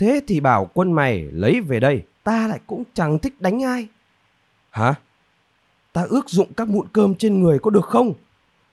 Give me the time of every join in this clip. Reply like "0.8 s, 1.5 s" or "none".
2.2 s, 4.6 s